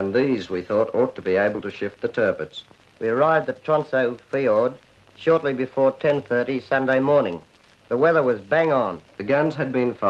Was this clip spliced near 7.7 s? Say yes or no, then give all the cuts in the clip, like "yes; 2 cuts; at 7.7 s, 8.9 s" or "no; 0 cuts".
no; 2 cuts; at 2.8 s, 9.1 s